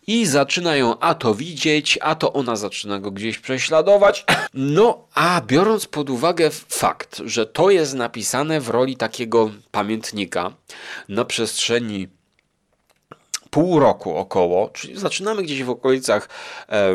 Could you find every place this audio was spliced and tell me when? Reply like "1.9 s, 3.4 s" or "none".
4.5 s